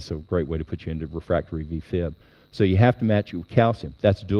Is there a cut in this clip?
no; 0 cuts

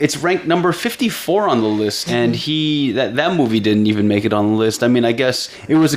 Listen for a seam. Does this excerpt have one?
yes; 1 cut; at 2.1 s

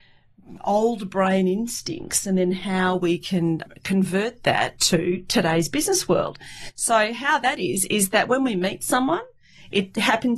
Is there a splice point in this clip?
no; 0 cuts

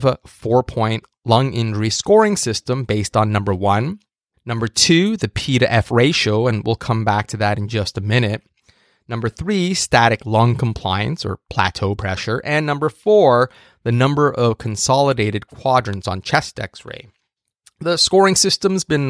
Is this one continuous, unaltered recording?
no; 1 cut; at 4.3 s

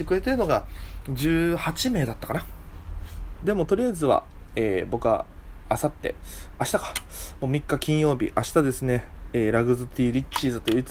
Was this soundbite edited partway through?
yes; 1 cut; at 3.4 s

